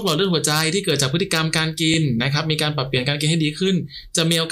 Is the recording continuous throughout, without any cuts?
yes; 0 cuts

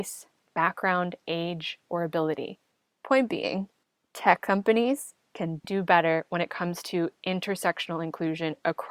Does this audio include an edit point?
yes; 2 cuts; at 2.9 s, 5.6 s

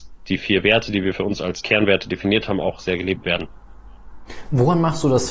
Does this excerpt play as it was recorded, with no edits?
yes; 0 cuts

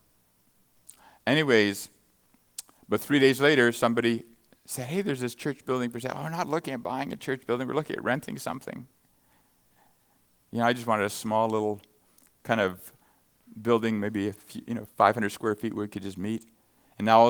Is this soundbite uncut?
yes; 0 cuts

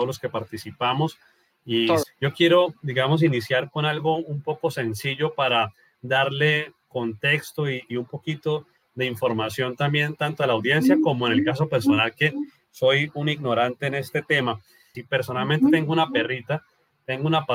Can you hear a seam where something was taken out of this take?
yes; 2 cuts; at 2.0 s, 14.9 s

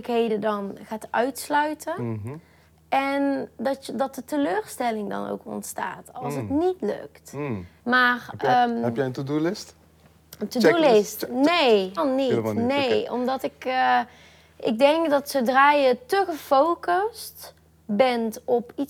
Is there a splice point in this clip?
yes; 2 cuts; at 7.8 s, 12.0 s

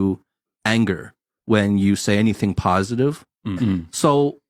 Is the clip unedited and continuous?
no; 1 cut; at 3.6 s

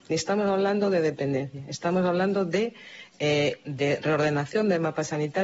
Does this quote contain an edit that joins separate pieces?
no; 0 cuts

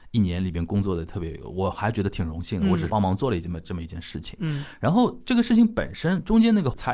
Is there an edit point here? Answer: yes; 1 cut; at 2.9 s

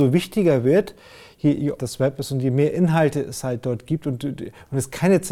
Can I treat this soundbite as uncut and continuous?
no; 1 cut; at 1.8 s

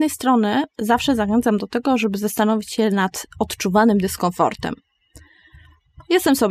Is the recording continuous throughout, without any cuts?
yes; 0 cuts

